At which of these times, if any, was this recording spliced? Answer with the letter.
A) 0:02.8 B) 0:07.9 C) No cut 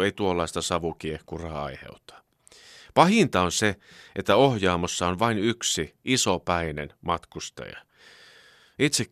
C